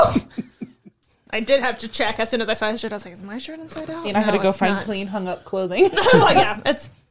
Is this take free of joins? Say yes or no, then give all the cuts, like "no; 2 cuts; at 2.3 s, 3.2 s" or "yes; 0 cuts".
yes; 0 cuts